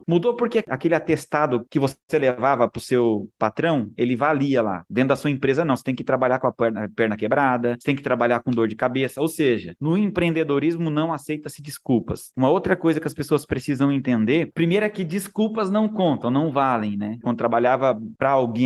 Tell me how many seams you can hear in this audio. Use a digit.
2